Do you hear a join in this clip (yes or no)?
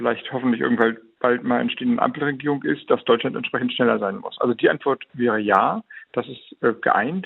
no